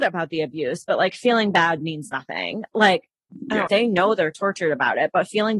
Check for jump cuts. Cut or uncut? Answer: cut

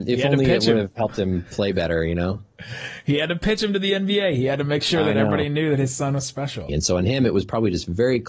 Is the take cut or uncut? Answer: cut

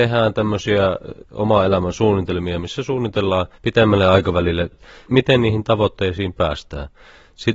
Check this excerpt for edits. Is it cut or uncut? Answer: cut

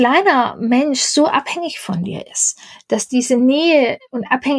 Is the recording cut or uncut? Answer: uncut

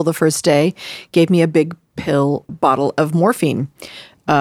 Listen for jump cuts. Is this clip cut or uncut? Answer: cut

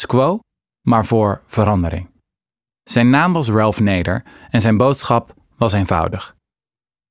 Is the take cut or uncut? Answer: cut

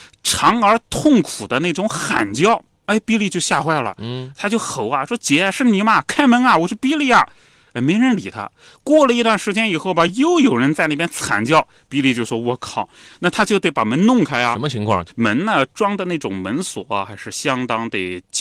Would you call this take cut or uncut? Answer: uncut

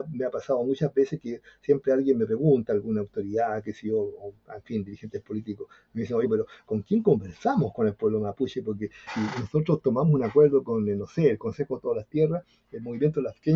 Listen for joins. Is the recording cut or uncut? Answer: cut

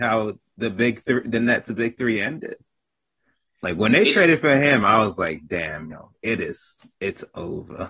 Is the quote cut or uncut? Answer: uncut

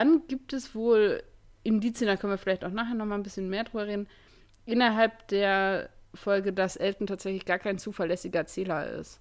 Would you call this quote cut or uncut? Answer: uncut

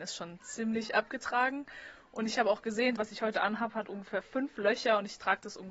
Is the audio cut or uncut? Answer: cut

